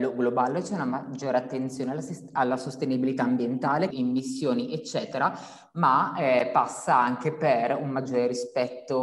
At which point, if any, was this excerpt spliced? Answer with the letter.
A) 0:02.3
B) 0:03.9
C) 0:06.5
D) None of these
B